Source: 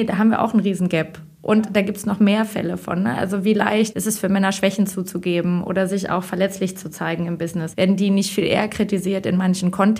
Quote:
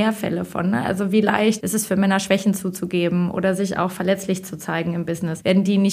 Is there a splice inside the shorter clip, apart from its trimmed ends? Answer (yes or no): no